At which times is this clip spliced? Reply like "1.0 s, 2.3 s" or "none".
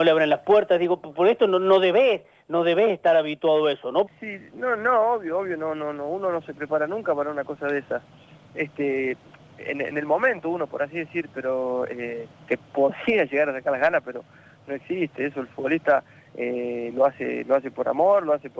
4.1 s